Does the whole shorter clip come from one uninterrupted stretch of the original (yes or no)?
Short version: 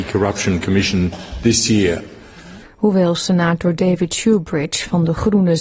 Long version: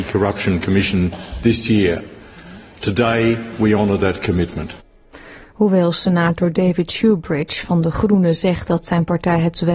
no